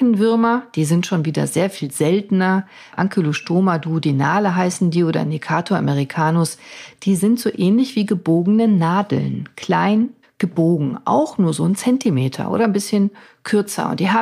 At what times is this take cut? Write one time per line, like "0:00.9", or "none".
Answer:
0:10.2